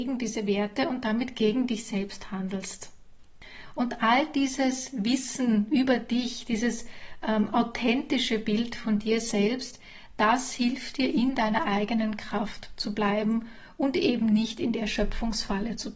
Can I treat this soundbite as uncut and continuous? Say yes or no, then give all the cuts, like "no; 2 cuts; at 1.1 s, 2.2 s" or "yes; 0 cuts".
yes; 0 cuts